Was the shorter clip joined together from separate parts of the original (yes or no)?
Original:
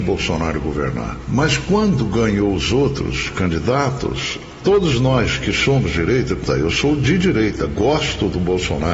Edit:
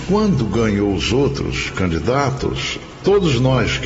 no